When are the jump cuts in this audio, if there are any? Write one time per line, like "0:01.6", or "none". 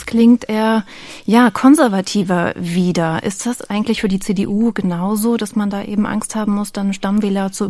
none